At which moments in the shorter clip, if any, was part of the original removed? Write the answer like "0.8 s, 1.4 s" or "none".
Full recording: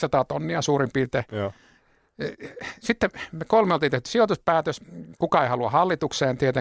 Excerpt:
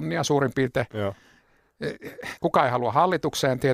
2.4 s